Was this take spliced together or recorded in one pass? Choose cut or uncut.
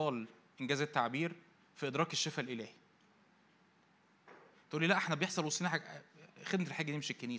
cut